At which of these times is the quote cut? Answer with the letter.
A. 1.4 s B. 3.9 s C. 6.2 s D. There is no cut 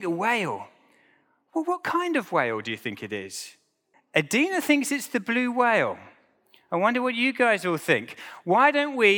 B